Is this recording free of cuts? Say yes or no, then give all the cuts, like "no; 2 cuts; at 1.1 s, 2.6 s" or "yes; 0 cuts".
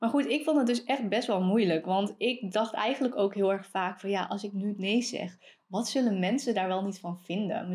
yes; 0 cuts